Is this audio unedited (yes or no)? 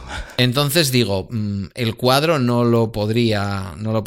yes